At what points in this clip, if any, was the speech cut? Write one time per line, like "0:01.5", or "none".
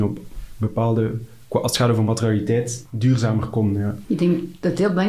none